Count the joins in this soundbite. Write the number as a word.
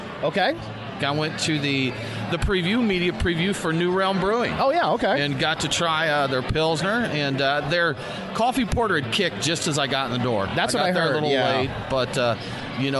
one